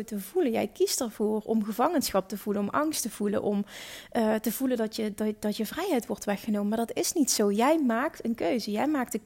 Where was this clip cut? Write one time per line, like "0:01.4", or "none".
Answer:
none